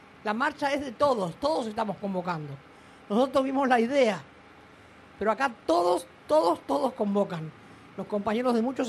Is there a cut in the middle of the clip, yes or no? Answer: no